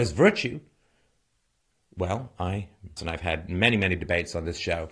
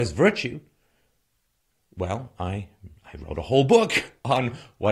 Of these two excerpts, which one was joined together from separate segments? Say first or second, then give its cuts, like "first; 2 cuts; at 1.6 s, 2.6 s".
first; 1 cut; at 3.0 s